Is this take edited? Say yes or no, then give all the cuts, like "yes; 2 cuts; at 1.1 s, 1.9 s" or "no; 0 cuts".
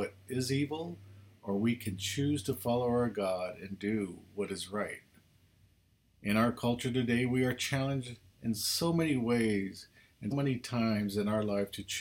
yes; 1 cut; at 10.3 s